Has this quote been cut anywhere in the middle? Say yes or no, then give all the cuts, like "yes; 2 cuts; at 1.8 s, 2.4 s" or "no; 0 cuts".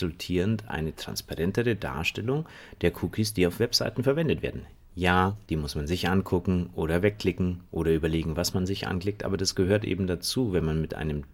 yes; 1 cut; at 5.5 s